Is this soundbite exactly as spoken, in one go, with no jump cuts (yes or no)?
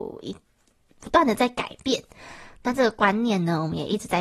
yes